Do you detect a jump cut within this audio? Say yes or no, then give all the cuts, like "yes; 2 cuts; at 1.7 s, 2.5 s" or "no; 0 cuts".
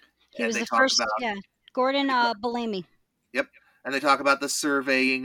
no; 0 cuts